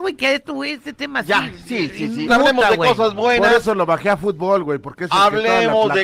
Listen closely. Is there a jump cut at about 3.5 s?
no; 1 cut; at 2.3 s

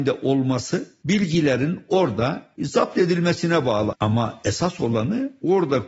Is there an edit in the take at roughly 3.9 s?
yes; 1 cut; at 3.9 s

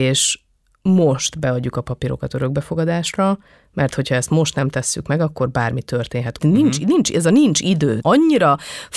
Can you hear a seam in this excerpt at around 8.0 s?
yes; 2 cuts; at 6.4 s, 8.0 s

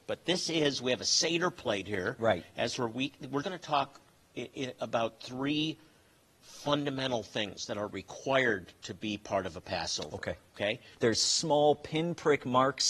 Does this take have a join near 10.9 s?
yes; 2 cuts; at 3.4 s, 10.9 s

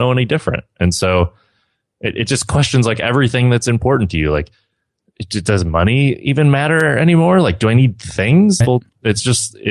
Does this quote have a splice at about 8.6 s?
yes; 1 cut; at 8.6 s

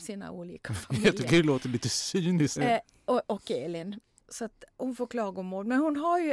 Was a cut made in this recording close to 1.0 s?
no; 2 cuts; at 2.6 s, 4.2 s

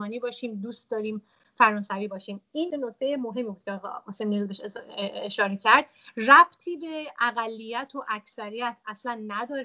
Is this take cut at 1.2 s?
no; 1 cut; at 2.7 s

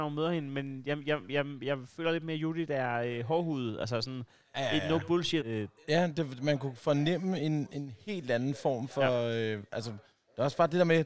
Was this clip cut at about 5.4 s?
yes; 1 cut; at 5.4 s

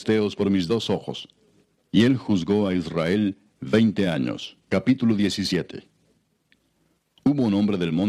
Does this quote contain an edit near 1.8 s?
yes; 1 cut; at 1.8 s

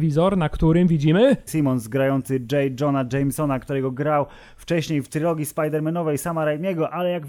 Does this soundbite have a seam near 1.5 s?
yes; 1 cut; at 1.5 s

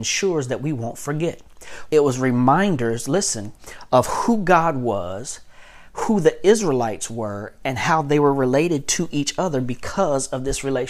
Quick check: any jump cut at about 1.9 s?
yes; 1 cut; at 1.9 s

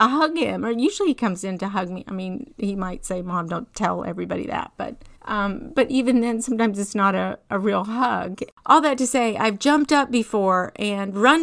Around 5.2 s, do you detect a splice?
yes; 1 cut; at 5.2 s

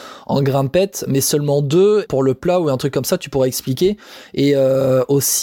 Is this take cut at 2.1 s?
yes; 1 cut; at 2.1 s

